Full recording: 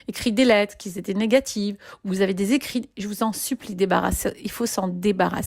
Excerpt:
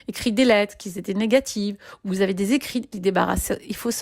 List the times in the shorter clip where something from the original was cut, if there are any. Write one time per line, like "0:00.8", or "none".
0:02.9